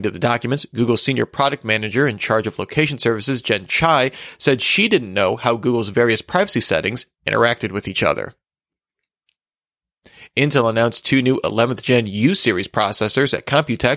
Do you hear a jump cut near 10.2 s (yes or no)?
no